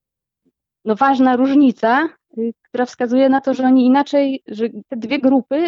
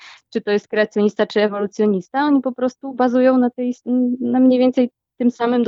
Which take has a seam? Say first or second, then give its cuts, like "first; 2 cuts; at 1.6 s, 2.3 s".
first; 1 cut; at 4.5 s